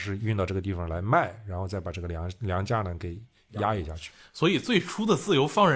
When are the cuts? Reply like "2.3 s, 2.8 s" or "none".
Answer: none

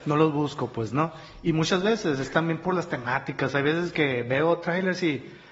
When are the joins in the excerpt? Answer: none

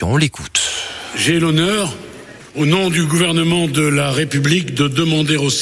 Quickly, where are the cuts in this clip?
2.5 s

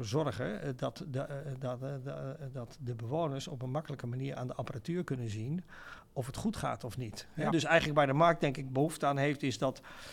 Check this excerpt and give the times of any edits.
7.5 s

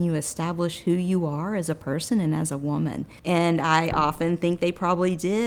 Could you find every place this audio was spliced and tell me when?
3.2 s

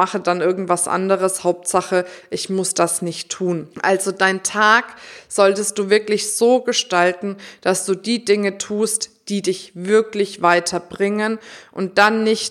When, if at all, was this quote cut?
3.7 s

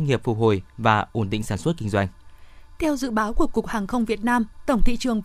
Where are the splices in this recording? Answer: none

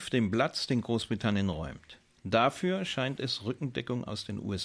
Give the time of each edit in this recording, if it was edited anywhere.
2.2 s

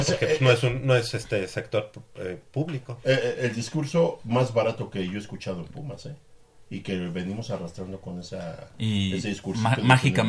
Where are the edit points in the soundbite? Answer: none

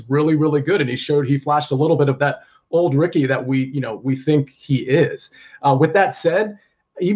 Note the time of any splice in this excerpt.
none

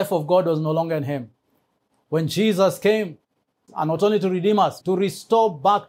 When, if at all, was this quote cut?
3.7 s, 4.8 s

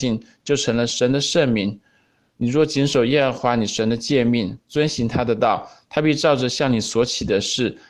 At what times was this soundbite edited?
2.3 s

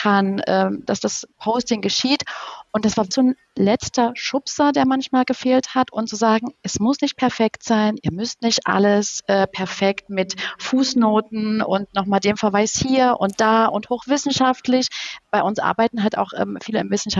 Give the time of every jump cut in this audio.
3.1 s

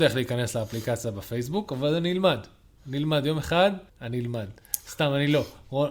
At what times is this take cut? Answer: 3.9 s

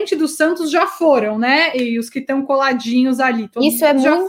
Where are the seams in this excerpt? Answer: none

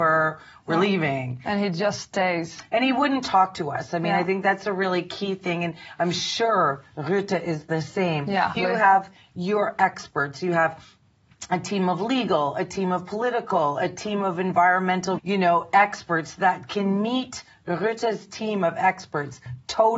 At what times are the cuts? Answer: 8.6 s, 15.2 s

